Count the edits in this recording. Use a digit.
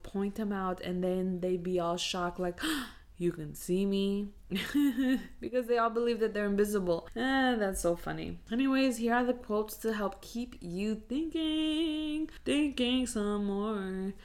0